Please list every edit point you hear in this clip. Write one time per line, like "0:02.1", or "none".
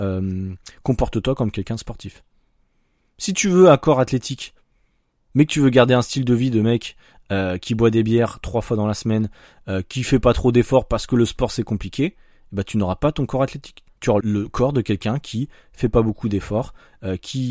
0:14.2